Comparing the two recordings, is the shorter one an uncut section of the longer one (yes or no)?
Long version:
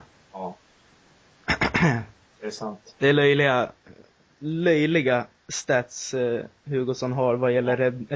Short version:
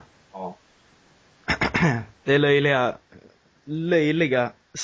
no